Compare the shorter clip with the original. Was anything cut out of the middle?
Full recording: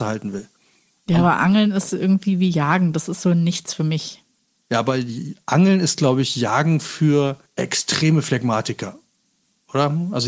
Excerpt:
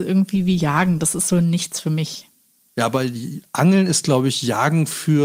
no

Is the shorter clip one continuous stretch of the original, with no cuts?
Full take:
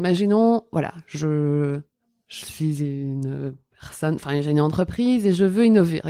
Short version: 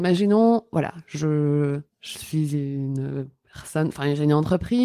no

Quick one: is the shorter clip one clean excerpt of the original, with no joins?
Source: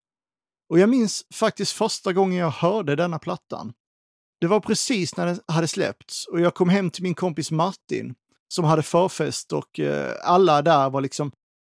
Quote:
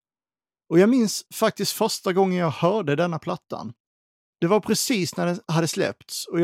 yes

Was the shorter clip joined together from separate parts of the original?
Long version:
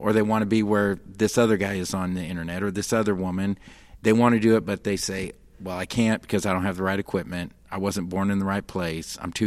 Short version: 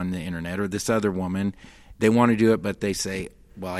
no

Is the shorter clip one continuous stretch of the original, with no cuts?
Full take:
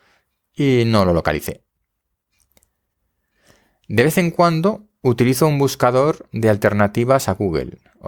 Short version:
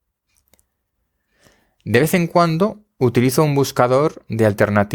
yes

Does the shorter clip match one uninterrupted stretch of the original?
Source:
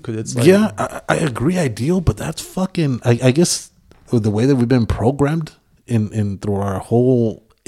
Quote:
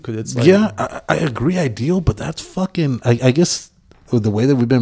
yes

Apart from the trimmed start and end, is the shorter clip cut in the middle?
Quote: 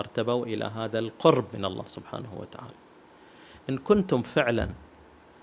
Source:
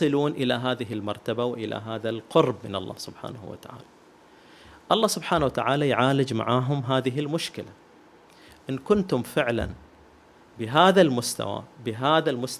yes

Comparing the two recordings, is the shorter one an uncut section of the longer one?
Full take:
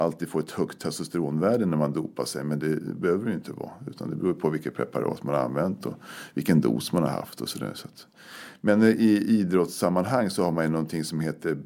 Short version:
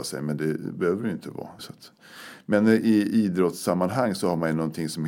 no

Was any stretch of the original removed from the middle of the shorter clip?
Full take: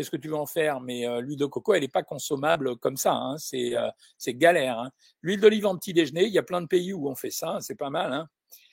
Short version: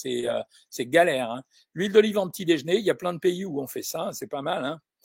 no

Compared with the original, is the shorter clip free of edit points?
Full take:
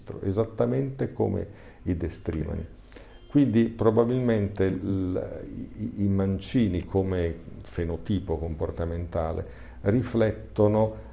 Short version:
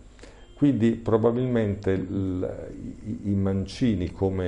yes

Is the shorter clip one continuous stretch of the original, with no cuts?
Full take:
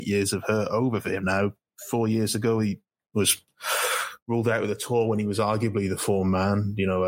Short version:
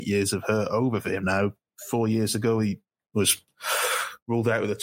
yes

